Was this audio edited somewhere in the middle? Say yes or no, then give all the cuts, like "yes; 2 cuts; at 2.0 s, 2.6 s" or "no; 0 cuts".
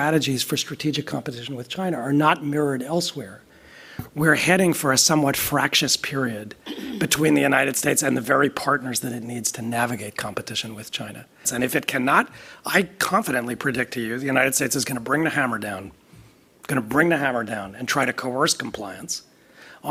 yes; 1 cut; at 11.4 s